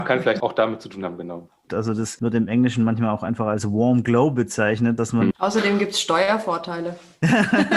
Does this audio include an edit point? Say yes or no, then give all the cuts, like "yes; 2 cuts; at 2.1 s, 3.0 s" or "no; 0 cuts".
yes; 2 cuts; at 1.7 s, 5.3 s